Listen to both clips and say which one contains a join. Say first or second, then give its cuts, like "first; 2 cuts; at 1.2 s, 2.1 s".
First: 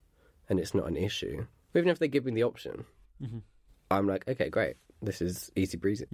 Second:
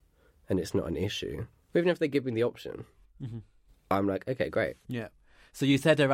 second; 1 cut; at 4.8 s